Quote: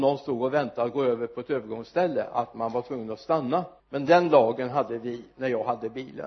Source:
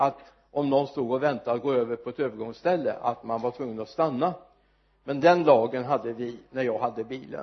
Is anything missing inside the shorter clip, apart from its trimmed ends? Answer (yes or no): yes